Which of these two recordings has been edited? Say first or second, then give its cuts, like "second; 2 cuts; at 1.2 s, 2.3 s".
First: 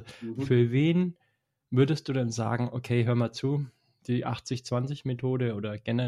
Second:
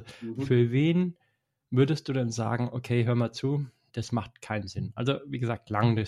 second; 1 cut; at 3.9 s